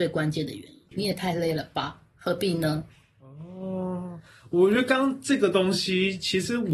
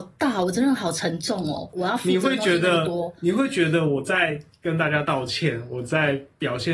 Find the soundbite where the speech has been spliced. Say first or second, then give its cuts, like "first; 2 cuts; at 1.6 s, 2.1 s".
first; 1 cut; at 0.9 s